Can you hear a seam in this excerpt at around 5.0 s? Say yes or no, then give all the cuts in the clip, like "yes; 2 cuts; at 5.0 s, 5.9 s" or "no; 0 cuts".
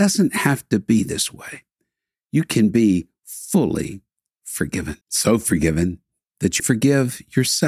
yes; 2 cuts; at 5.0 s, 6.6 s